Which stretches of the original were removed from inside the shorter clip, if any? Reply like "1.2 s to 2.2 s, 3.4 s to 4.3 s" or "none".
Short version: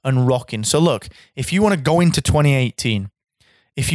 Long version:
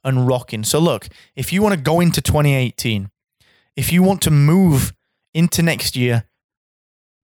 none